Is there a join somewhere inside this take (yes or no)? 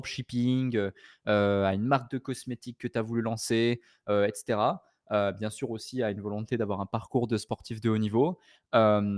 no